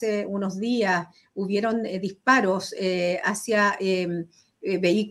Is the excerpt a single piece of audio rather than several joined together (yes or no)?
yes